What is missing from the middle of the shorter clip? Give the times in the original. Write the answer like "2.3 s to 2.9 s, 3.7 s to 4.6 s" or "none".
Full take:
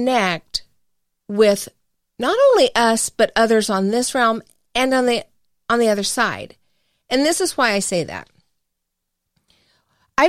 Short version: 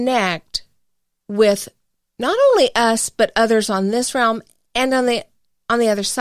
none